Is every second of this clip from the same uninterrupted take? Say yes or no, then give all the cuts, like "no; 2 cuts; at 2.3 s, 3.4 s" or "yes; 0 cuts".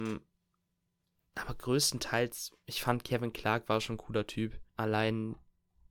no; 1 cut; at 4.7 s